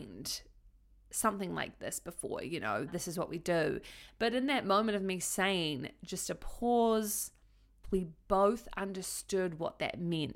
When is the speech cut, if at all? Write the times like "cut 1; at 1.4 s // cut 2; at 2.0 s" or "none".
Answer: cut 1; at 2.9 s // cut 2; at 7.8 s